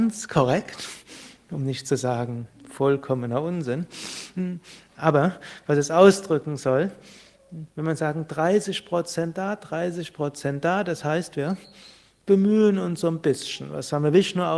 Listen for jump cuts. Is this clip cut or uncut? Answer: uncut